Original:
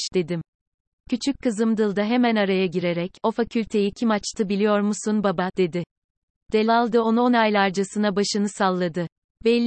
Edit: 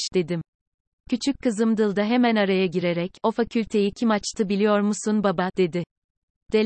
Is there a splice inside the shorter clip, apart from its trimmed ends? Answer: no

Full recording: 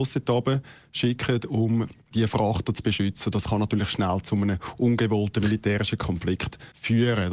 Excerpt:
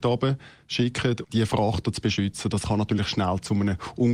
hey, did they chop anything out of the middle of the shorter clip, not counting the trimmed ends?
yes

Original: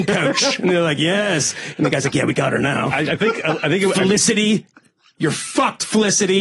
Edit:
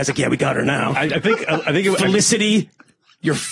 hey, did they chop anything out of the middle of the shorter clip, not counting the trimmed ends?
no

